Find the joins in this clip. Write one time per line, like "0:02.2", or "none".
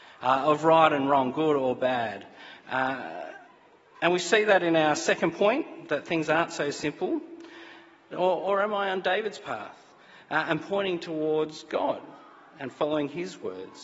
0:08.1